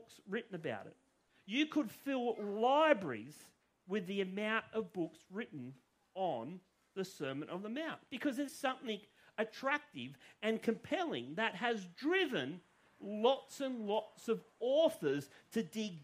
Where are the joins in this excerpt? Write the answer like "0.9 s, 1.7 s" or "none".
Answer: 8.5 s